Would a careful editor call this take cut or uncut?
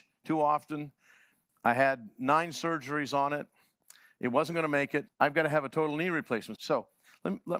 cut